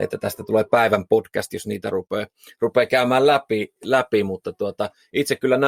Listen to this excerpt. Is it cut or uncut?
uncut